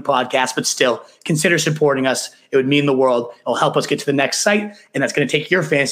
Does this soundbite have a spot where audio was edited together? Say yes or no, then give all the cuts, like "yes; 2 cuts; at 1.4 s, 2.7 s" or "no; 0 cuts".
no; 0 cuts